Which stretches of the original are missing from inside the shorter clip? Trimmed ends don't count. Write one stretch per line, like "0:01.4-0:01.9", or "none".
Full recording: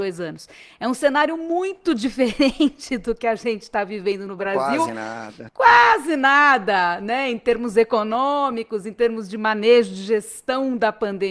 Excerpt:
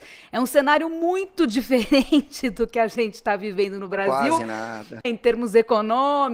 0:05.5-0:07.3